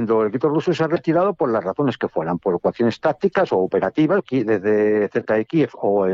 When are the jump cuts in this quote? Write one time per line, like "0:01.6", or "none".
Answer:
0:02.4
0:04.2